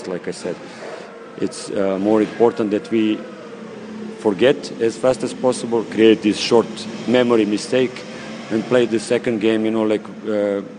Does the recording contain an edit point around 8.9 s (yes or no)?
yes